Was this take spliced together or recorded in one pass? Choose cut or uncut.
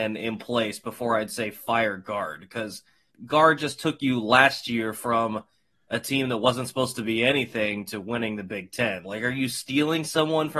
cut